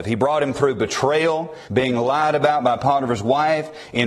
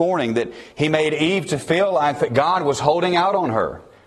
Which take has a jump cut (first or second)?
first